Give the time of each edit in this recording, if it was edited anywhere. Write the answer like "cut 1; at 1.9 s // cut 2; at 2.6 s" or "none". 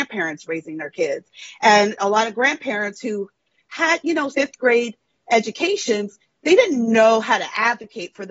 cut 1; at 4.3 s